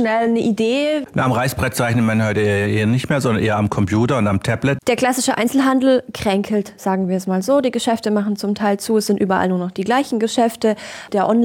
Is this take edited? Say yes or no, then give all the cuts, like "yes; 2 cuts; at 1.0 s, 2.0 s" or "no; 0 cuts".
yes; 1 cut; at 4.8 s